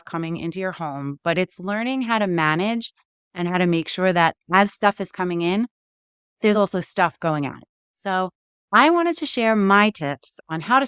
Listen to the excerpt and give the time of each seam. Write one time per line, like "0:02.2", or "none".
none